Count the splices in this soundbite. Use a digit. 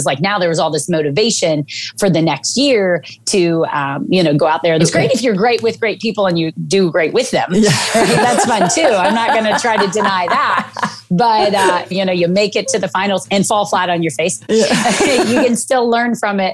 3